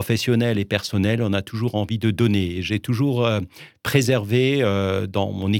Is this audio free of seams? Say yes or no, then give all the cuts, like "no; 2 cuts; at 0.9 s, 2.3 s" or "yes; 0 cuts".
yes; 0 cuts